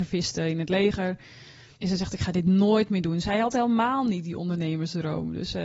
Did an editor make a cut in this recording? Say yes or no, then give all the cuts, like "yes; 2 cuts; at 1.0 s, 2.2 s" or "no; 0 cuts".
yes; 1 cut; at 1.7 s